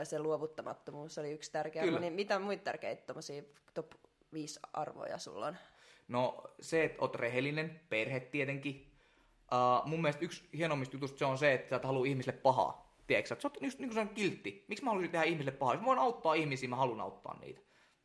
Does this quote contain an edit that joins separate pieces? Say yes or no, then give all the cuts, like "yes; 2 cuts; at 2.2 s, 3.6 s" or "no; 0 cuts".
no; 0 cuts